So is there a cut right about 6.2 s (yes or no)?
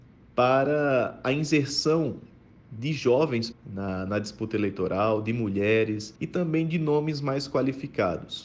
yes